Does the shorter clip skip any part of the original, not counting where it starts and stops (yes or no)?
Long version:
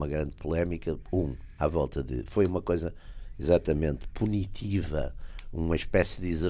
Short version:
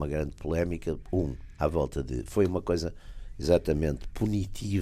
no